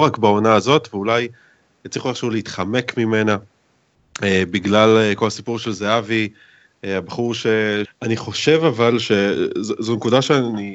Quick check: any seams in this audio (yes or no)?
yes